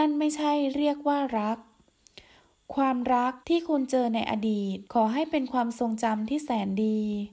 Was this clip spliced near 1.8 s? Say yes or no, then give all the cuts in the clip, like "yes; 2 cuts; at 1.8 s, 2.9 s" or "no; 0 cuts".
no; 2 cuts; at 3.4 s, 4.9 s